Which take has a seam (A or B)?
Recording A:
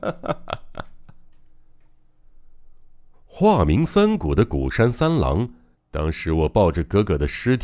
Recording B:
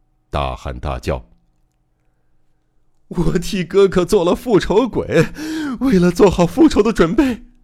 A